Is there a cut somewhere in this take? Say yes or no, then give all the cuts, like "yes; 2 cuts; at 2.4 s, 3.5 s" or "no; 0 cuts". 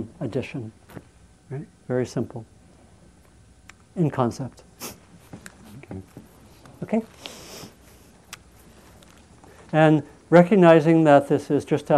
yes; 1 cut; at 1.4 s